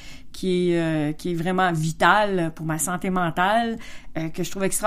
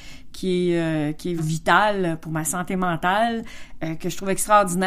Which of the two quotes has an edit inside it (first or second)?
second